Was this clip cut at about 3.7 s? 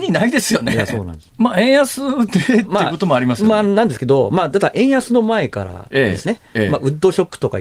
no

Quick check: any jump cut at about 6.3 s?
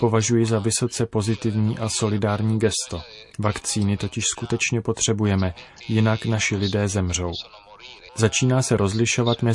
no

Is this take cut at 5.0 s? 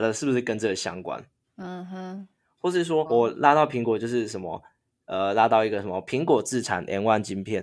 no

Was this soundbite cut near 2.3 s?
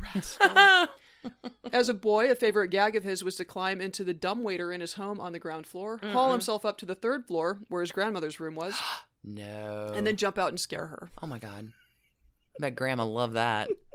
no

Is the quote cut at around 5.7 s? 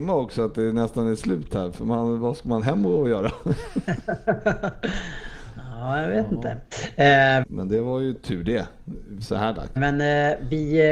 no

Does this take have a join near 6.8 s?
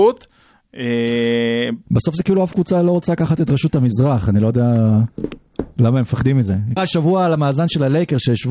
yes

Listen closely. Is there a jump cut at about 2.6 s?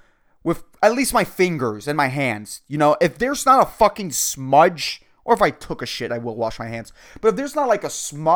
no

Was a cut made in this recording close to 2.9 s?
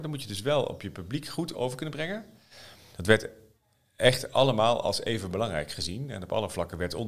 yes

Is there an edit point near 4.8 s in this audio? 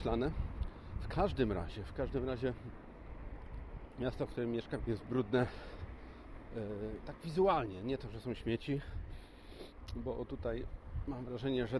yes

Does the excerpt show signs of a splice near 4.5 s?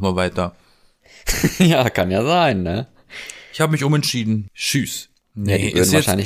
yes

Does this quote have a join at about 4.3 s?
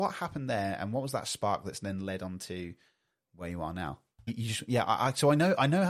yes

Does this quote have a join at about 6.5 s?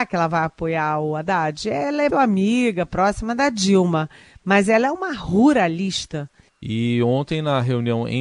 yes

